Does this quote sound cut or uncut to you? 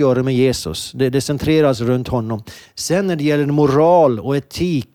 uncut